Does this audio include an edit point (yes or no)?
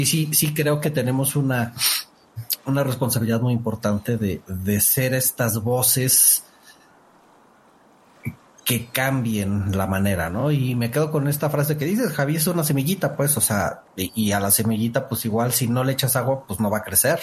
no